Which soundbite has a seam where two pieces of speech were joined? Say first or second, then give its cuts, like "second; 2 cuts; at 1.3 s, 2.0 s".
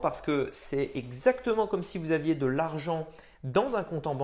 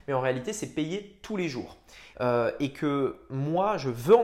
second; 1 cut; at 2.1 s